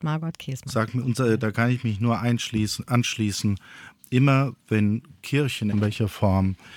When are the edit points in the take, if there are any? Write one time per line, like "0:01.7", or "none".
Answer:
0:05.7